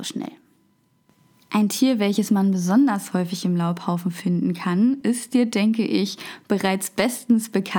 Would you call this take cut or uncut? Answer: uncut